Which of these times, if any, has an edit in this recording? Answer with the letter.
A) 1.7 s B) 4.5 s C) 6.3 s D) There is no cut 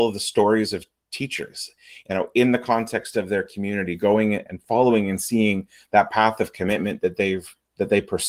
B